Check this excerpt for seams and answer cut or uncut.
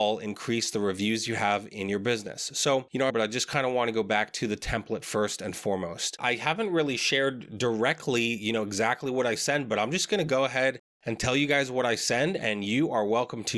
cut